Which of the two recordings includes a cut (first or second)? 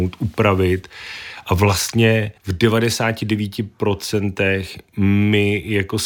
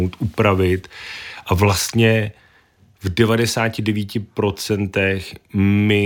first